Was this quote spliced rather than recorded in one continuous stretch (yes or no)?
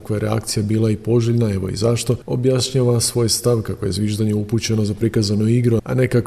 no